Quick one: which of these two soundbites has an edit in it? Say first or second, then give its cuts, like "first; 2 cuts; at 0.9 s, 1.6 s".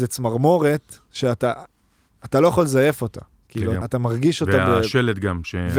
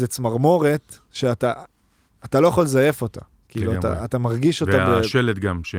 first; 1 cut; at 3.8 s